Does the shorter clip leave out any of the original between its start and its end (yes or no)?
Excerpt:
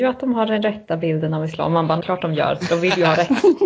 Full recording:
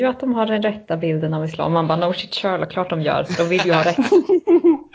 yes